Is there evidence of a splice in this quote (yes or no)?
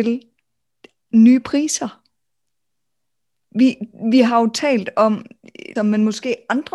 yes